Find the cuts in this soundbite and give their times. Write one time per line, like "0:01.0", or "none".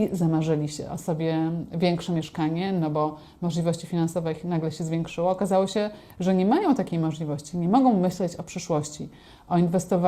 none